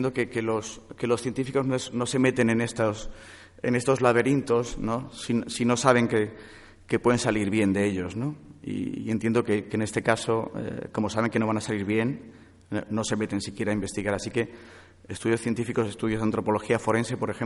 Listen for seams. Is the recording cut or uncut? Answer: uncut